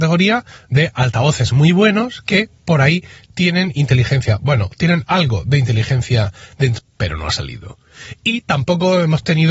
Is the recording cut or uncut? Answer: cut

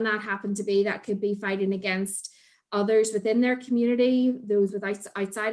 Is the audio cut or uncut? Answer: uncut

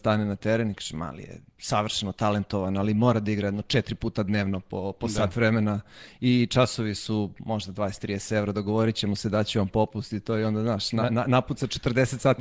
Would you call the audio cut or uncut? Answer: uncut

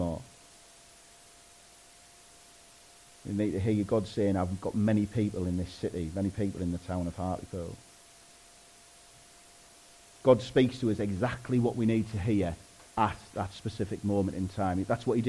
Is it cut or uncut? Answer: uncut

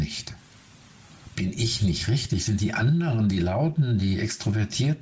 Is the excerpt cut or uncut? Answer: uncut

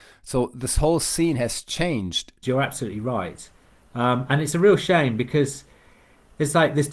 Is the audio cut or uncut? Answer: cut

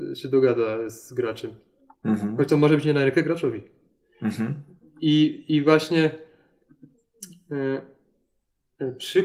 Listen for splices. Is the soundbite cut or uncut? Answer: uncut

